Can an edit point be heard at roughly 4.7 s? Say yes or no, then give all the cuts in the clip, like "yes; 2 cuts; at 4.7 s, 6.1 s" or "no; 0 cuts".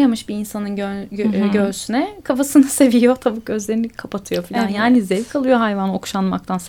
no; 0 cuts